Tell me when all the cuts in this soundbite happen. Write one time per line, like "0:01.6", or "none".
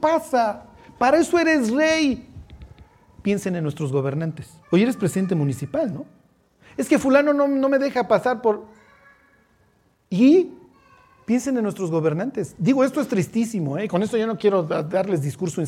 0:04.6